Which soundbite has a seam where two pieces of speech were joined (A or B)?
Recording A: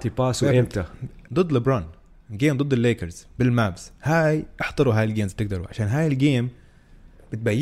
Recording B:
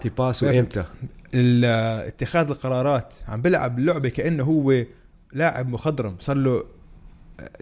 A